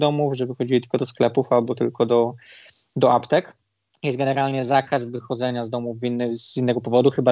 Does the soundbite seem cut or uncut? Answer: uncut